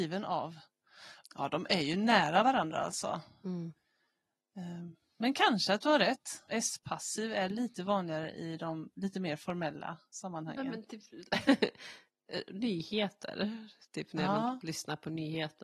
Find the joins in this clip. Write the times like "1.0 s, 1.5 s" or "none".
1.2 s, 6.5 s